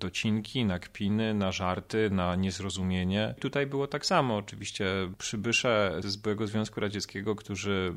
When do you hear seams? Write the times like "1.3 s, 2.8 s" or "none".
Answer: 6.0 s